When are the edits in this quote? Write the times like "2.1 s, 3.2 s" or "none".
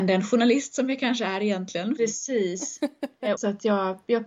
2.0 s, 3.4 s